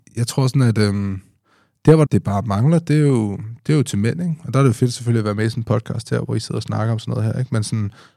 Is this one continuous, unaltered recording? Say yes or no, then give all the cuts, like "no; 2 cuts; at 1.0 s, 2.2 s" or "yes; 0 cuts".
no; 1 cut; at 2.1 s